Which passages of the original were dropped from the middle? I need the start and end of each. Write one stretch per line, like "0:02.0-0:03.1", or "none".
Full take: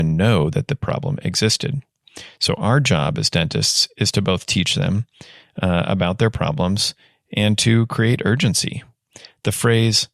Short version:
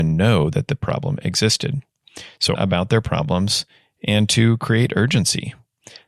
0:02.6-0:05.8